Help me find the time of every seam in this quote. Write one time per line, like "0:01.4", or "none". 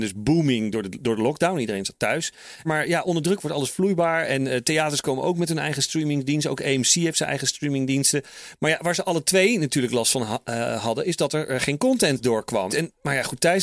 0:02.6
0:12.7

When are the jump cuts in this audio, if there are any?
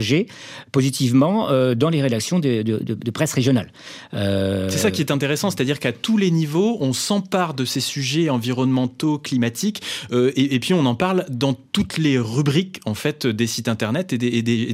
none

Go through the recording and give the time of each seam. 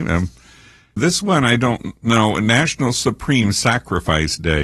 0:01.0

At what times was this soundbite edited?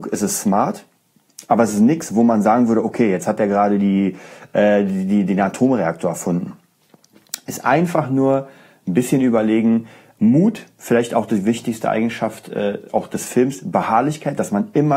none

